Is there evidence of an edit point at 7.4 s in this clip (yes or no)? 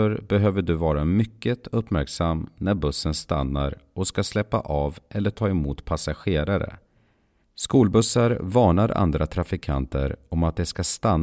yes